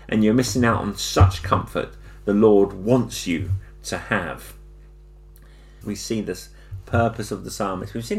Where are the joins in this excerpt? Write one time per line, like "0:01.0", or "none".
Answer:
0:05.8